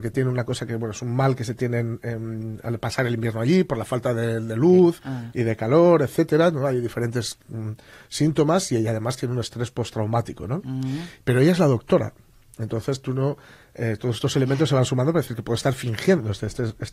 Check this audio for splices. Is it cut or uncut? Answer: uncut